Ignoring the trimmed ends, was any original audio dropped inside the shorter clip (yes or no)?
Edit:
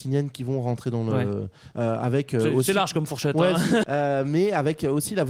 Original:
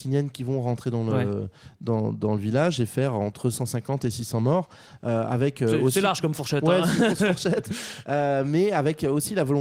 yes